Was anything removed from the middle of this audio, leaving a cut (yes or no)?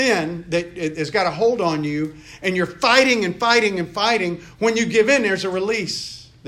no